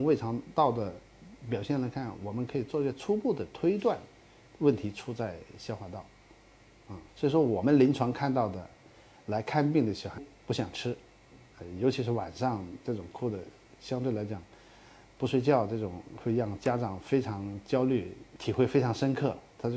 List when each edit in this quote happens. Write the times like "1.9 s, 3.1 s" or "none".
7.1 s, 10.2 s